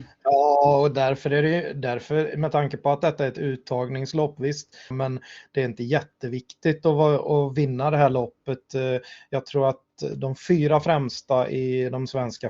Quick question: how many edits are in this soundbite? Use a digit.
1